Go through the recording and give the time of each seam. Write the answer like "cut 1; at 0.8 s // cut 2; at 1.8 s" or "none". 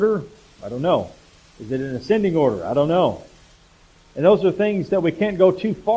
none